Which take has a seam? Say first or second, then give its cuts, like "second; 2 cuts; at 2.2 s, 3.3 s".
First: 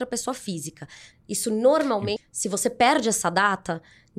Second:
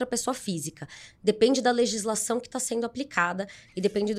first; 2 cuts; at 1.1 s, 2.2 s